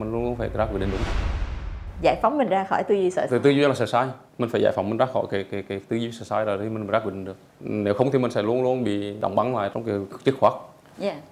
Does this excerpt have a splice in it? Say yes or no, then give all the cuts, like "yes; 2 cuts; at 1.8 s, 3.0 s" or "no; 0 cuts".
yes; 1 cut; at 10.1 s